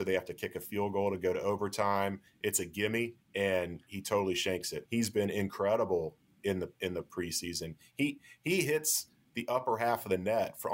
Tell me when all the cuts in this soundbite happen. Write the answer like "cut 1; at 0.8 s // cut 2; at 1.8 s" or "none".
cut 1; at 3.2 s // cut 2; at 4.8 s

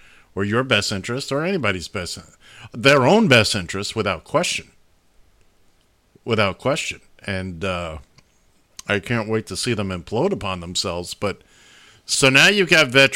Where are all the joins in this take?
none

